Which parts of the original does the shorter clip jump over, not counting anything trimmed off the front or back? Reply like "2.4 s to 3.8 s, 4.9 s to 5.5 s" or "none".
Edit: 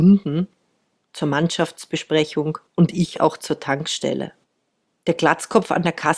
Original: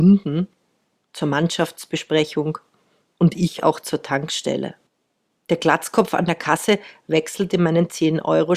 2.7 s to 3.1 s